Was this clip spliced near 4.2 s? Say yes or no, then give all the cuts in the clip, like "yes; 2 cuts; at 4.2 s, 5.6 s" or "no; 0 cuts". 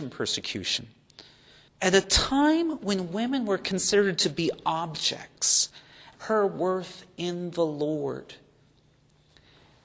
no; 2 cuts; at 1.7 s, 6.1 s